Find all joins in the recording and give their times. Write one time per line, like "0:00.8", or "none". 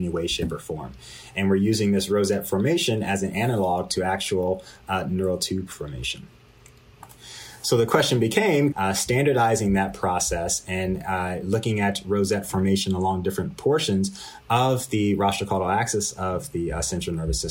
0:08.7